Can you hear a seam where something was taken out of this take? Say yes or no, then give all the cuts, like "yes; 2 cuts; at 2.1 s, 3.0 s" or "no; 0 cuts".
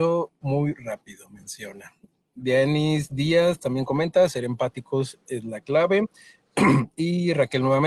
no; 0 cuts